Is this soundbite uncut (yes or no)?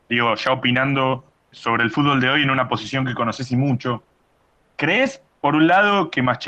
yes